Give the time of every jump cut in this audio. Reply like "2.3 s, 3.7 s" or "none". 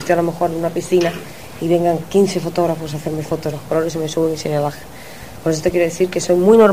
3.5 s